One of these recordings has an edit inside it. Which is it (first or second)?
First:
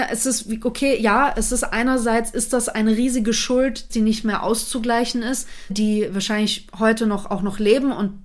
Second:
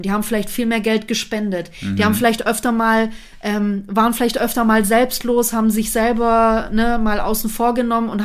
first